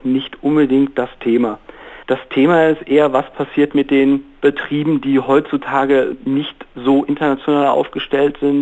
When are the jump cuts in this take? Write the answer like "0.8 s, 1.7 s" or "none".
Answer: 2.0 s